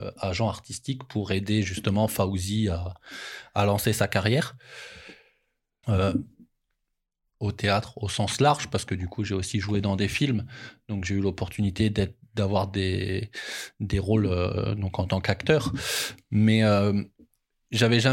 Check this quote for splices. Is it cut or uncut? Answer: cut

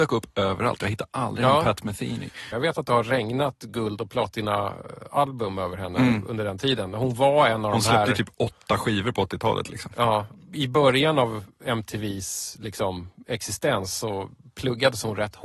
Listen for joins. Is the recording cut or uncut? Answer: cut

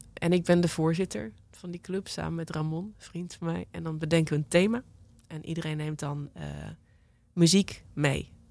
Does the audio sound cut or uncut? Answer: uncut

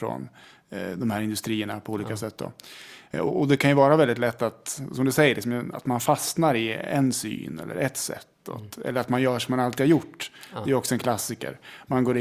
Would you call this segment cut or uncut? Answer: uncut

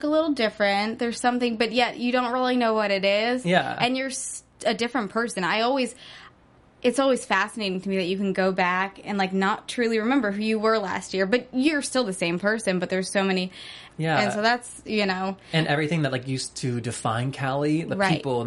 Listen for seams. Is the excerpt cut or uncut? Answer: cut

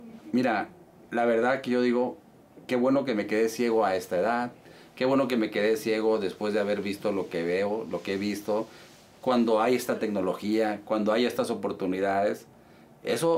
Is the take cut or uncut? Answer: uncut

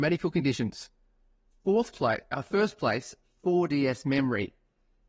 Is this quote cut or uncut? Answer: uncut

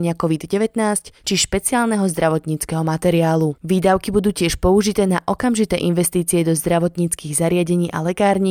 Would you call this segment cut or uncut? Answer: cut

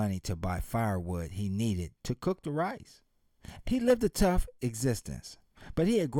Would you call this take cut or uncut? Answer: cut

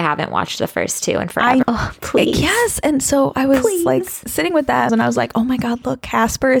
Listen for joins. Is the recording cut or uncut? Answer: cut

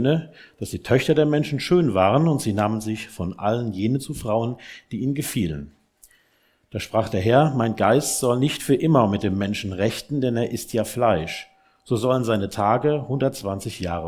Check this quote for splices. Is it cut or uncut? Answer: uncut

